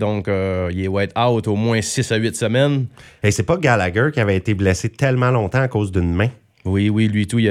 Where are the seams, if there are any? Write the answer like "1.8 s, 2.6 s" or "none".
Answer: none